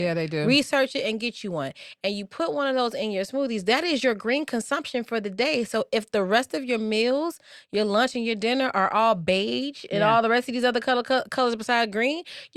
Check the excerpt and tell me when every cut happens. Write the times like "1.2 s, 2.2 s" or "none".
none